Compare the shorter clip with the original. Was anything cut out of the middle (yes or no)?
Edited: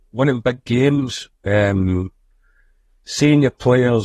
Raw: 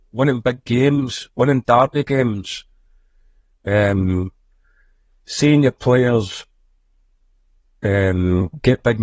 yes